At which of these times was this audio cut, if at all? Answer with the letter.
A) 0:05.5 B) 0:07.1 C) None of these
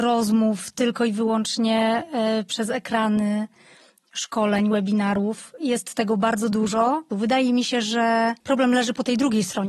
B